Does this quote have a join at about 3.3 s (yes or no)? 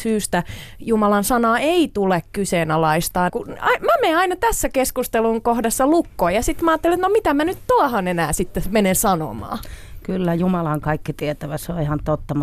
yes